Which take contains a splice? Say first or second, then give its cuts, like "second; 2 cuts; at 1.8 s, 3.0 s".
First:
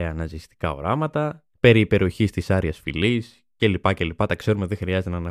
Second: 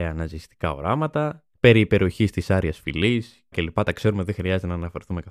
second; 1 cut; at 3.5 s